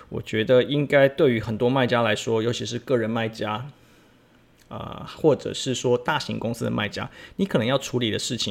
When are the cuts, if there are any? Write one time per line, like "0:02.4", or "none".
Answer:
none